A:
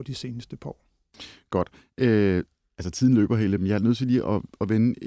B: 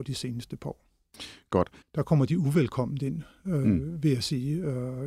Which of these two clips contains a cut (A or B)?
B